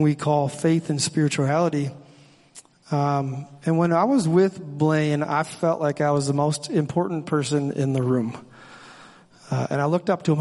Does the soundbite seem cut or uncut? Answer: cut